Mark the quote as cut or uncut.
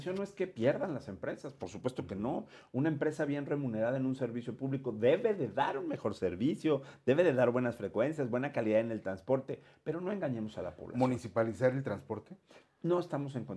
uncut